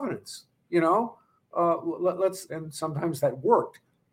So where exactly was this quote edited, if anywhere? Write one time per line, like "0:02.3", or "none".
0:02.5